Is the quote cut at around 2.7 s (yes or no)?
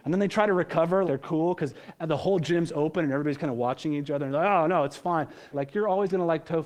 no